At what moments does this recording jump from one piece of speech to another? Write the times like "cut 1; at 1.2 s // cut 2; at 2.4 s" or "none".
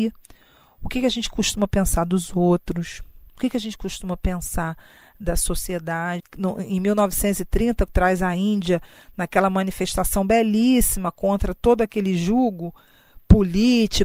cut 1; at 6.2 s // cut 2; at 7.9 s